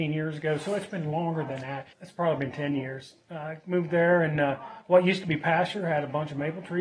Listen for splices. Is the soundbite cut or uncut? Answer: uncut